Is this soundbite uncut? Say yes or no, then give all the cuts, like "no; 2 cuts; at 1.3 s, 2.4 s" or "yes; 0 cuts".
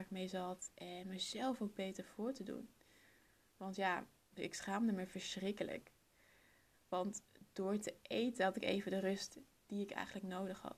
no; 2 cuts; at 4.3 s, 6.7 s